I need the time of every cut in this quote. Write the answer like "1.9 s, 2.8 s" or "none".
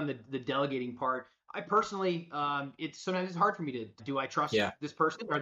4.0 s